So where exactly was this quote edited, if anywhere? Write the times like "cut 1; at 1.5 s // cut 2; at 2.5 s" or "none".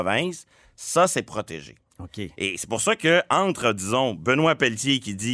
none